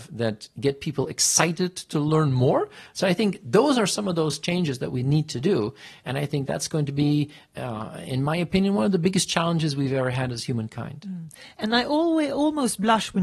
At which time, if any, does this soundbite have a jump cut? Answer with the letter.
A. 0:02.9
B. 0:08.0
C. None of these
A